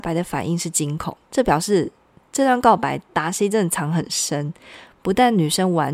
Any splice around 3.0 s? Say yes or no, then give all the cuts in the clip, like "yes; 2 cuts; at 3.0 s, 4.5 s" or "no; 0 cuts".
no; 1 cut; at 1.2 s